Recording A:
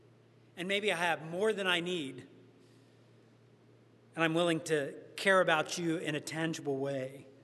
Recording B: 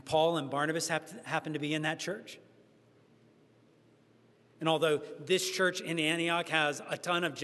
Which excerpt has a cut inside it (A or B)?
B